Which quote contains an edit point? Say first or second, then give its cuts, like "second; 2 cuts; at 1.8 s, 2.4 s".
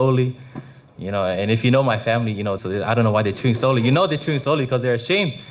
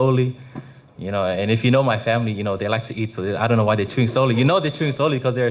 first; 1 cut; at 2.6 s